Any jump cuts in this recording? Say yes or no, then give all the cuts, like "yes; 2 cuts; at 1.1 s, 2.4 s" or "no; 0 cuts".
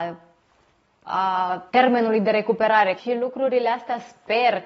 yes; 2 cuts; at 1.7 s, 3.0 s